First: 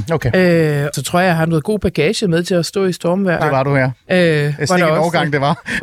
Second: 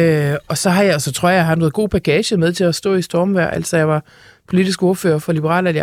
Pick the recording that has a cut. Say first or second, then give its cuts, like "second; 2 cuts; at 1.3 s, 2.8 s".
first; 2 cuts; at 0.9 s, 3.4 s